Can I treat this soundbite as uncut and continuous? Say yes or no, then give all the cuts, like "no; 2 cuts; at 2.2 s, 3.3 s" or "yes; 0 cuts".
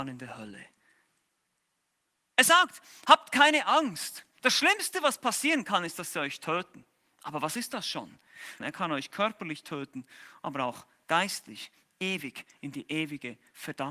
no; 1 cut; at 8.6 s